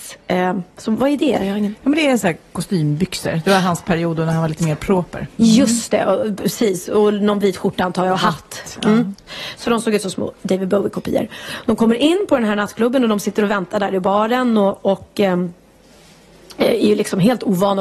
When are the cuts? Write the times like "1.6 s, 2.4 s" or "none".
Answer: 8.8 s